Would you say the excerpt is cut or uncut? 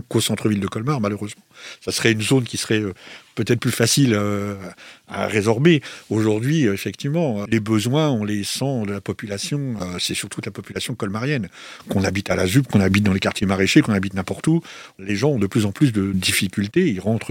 uncut